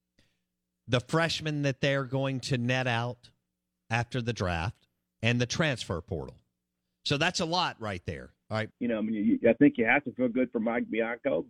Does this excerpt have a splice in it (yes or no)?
yes